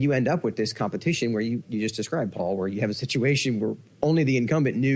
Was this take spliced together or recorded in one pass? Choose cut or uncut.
cut